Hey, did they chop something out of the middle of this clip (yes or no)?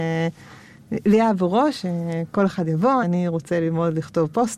yes